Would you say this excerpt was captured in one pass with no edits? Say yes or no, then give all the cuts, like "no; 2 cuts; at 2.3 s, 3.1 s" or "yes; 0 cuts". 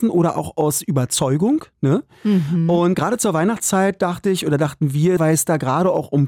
no; 2 cuts; at 2.9 s, 5.2 s